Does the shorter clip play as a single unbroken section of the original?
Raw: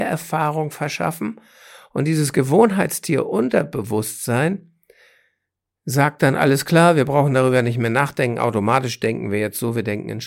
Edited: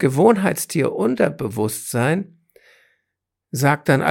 yes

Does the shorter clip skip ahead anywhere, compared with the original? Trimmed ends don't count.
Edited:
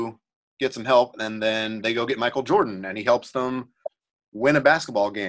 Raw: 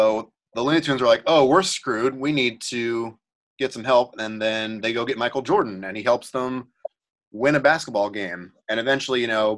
no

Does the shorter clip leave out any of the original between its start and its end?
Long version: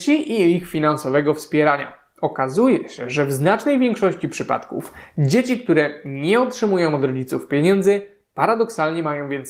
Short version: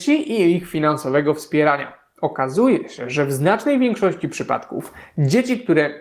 no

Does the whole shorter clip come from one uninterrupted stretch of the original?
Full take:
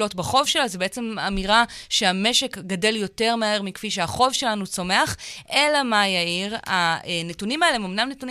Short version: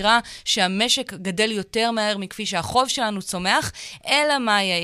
yes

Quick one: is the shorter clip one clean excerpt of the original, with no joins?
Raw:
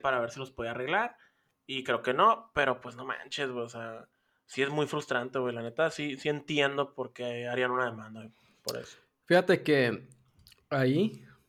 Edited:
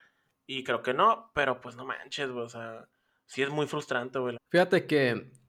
no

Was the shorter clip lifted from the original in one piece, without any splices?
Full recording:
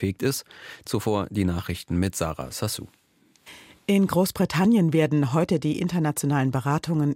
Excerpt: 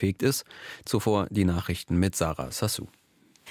yes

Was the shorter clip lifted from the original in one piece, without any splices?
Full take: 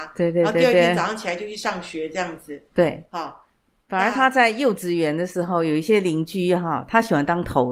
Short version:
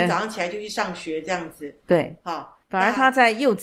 no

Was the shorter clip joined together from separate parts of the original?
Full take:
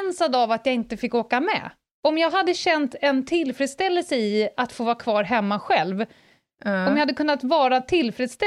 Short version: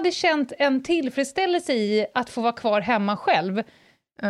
no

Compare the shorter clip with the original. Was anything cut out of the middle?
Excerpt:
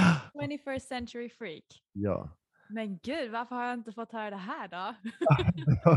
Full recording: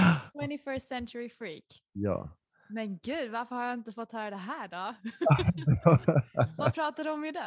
no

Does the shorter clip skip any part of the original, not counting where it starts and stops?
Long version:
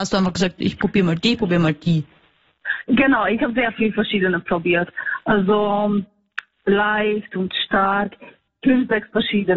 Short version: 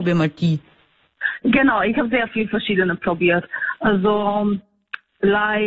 no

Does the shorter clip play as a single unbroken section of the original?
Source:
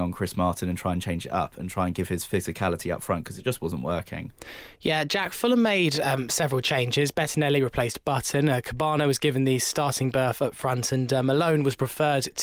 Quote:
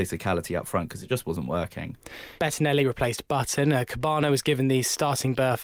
no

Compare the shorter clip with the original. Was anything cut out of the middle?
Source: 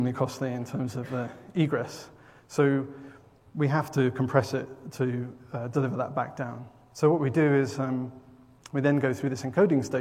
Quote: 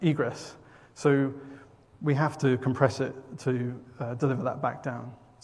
no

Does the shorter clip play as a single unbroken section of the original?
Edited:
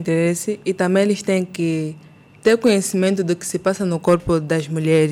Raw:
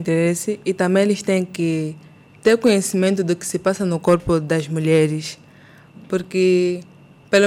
yes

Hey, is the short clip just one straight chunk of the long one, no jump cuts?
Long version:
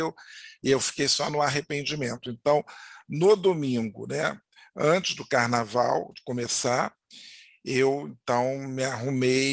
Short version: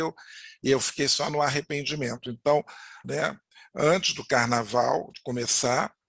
no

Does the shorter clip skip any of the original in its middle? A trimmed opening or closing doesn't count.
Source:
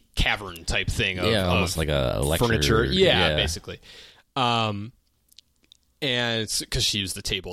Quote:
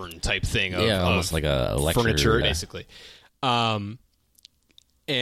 yes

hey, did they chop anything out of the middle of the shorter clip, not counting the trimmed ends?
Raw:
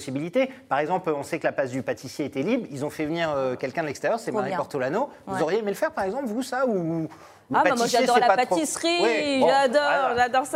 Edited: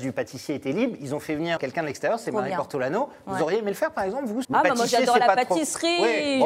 yes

